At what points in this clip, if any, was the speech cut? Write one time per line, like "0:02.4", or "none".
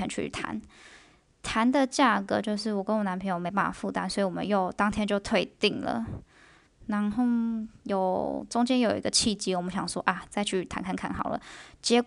none